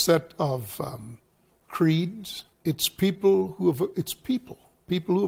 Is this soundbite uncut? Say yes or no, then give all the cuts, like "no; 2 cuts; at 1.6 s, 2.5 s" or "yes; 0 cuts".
no; 1 cut; at 2.5 s